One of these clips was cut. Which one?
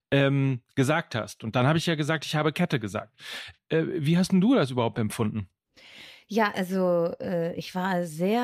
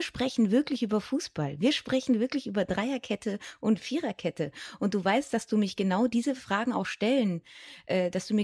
first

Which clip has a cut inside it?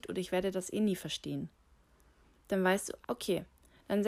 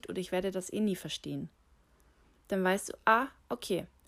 first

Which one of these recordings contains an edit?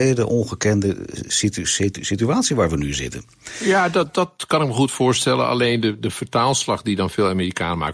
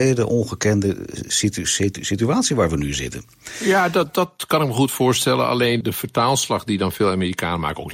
second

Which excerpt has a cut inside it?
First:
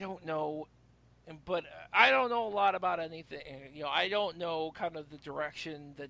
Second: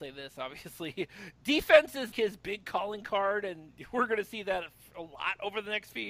second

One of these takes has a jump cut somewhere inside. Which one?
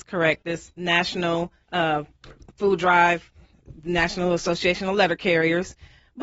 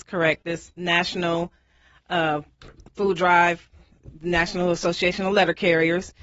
first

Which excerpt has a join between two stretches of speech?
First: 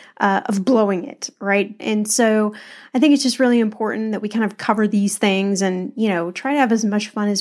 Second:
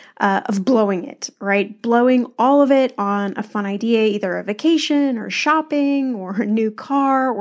first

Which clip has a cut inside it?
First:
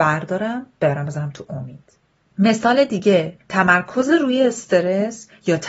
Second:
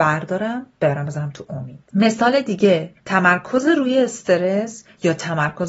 second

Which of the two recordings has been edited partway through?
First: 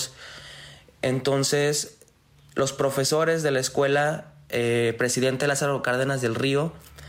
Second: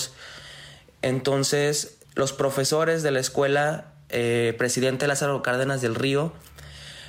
second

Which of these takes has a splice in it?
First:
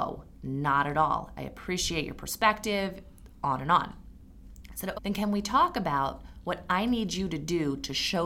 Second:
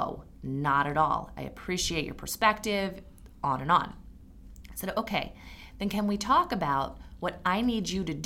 first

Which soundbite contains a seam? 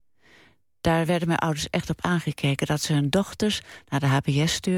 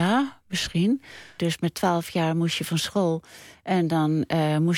second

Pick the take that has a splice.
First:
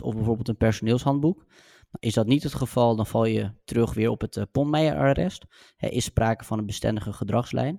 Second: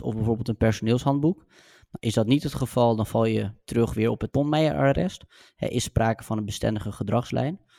second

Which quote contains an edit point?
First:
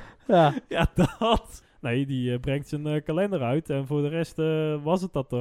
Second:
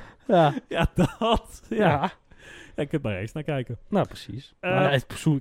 first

